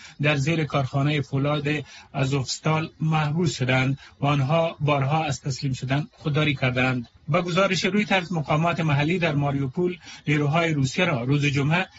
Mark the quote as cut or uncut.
cut